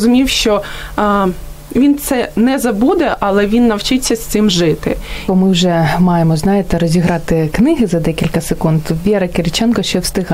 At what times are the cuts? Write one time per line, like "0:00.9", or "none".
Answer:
0:05.3